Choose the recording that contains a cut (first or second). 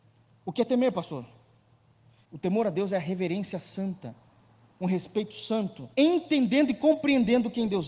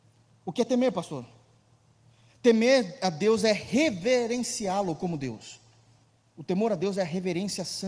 first